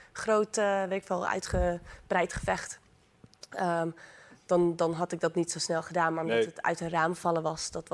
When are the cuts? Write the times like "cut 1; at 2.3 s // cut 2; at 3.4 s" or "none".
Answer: none